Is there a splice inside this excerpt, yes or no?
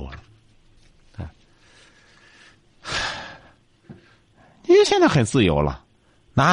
no